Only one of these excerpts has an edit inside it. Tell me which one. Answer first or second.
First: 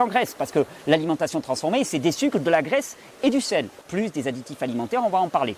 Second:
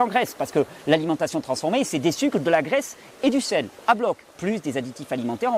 first